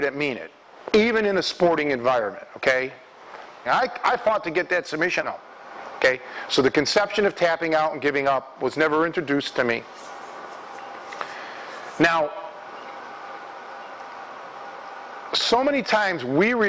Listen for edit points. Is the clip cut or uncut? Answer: cut